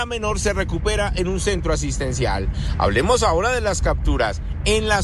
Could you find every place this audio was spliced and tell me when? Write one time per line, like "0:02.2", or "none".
none

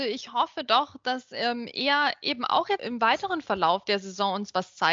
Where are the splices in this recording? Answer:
0:02.8

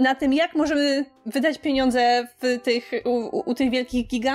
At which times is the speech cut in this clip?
none

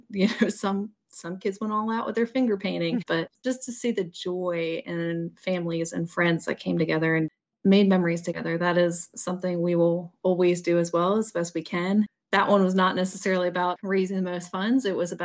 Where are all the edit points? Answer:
0:03.0

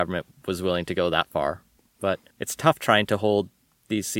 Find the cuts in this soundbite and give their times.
0:02.3

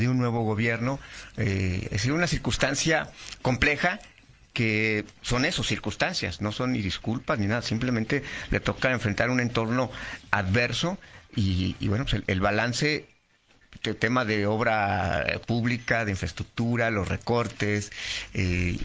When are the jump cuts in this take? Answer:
none

